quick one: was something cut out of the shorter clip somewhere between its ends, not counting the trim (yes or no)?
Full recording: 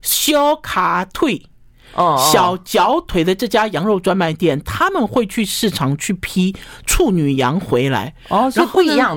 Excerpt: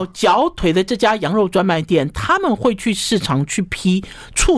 no